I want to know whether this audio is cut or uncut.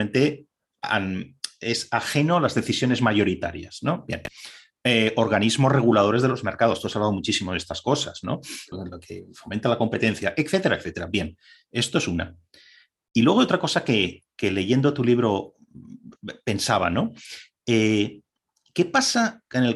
cut